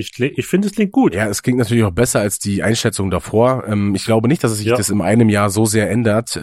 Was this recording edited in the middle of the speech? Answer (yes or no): no